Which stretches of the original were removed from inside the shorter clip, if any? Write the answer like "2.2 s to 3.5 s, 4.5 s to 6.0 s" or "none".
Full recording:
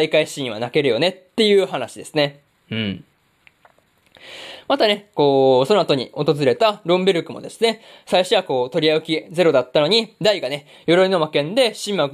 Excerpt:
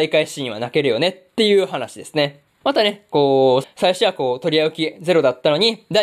2.6 s to 4.6 s, 5.7 s to 7.9 s